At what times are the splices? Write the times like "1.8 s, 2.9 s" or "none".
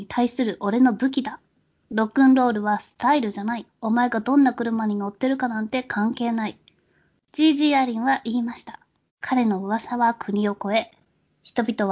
3.7 s, 7.2 s, 9.1 s